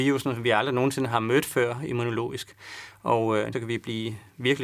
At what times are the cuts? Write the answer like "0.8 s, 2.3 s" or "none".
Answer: 3.5 s